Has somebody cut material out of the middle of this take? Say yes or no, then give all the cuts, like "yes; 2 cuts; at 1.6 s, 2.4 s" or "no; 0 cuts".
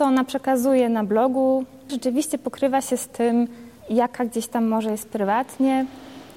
yes; 2 cuts; at 1.9 s, 3.8 s